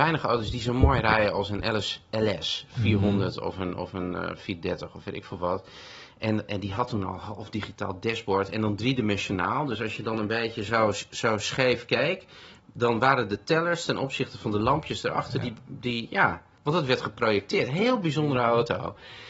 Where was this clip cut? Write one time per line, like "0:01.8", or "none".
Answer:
none